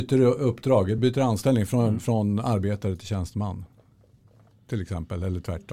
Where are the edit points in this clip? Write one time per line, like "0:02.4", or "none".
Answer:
none